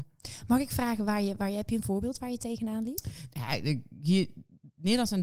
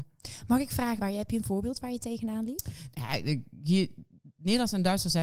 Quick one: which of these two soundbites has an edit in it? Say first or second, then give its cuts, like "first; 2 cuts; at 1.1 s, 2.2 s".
second; 1 cut; at 1.0 s